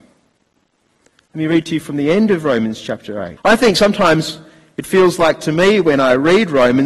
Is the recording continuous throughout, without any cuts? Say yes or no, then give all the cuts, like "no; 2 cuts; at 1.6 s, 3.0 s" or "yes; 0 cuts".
no; 2 cuts; at 1.3 s, 3.4 s